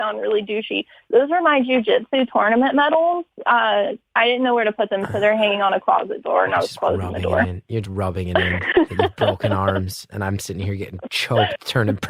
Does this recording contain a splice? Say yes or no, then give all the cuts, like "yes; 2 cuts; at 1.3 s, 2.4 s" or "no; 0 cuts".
yes; 1 cut; at 7.8 s